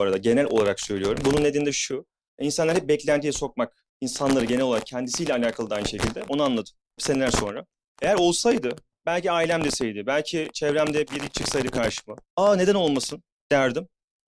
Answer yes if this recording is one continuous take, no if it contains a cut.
no